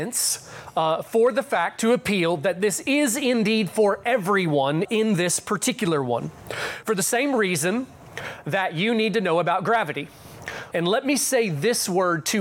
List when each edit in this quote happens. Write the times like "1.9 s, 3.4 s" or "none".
4.8 s, 10.7 s